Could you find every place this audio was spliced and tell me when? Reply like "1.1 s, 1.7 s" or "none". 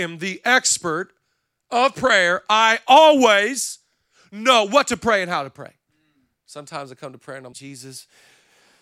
7.5 s

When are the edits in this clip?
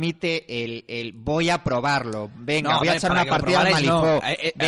none

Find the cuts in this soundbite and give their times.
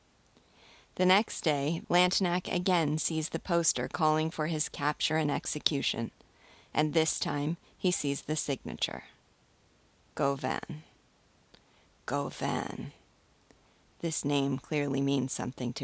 1.8 s

